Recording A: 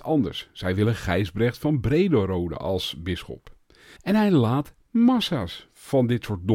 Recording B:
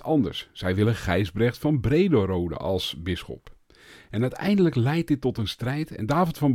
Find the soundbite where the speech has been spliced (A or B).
A